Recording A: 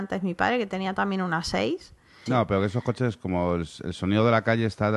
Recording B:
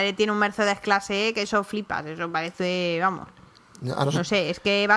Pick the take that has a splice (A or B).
A